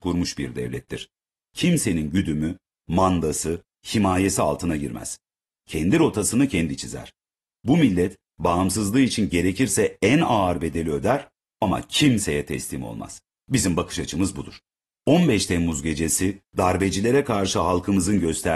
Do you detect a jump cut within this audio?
no; 0 cuts

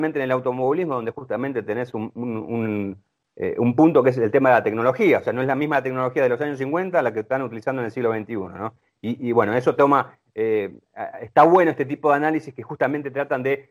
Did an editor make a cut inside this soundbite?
no; 0 cuts

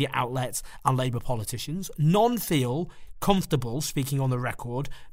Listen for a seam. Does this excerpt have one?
no; 0 cuts

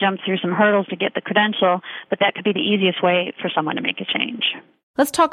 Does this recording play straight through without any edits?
yes; 0 cuts

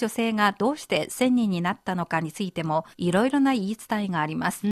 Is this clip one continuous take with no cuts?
no; 1 cut; at 2.9 s

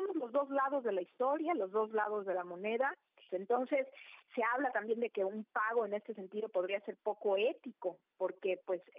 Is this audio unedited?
no; 1 cut; at 3.3 s

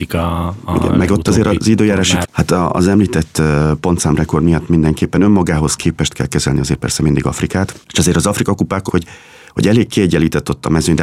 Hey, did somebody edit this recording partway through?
yes; 2 cuts; at 2.2 s, 8.9 s

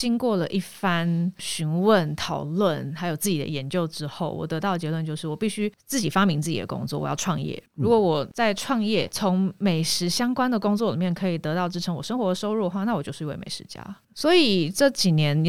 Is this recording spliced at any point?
no; 0 cuts

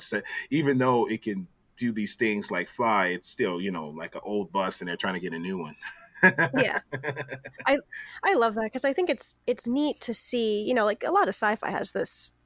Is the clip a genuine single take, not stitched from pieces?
yes; 0 cuts

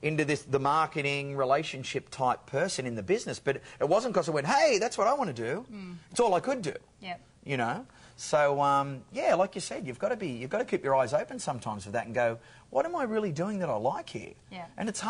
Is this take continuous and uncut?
yes; 0 cuts

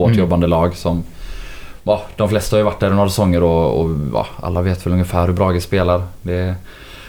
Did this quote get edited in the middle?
no; 0 cuts

